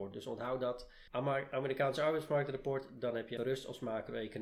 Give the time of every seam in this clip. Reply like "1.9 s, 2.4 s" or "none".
1.1 s, 3.4 s